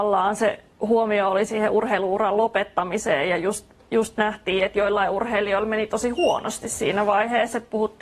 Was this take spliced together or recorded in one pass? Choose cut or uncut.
uncut